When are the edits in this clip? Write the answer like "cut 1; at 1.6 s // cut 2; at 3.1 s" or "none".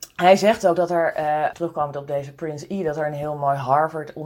cut 1; at 1.5 s